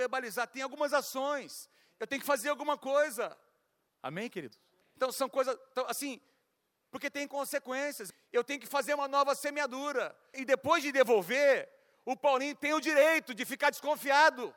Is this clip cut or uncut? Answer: uncut